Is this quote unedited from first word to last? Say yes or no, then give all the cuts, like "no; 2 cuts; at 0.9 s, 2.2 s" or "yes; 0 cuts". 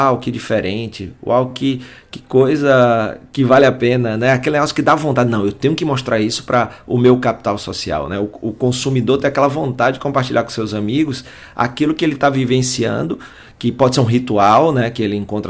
yes; 0 cuts